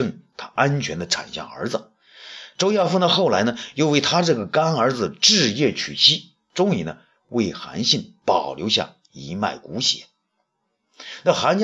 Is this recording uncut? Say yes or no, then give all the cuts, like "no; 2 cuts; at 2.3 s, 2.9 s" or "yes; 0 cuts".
yes; 0 cuts